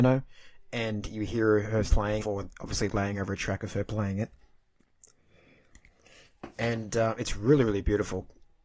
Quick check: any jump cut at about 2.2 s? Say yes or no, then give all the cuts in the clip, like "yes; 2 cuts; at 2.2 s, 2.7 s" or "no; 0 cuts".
yes; 1 cut; at 2.2 s